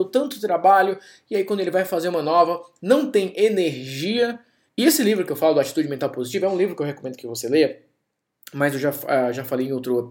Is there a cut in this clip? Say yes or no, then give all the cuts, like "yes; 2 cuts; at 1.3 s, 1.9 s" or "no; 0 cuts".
yes; 2 cuts; at 2.8 s, 4.7 s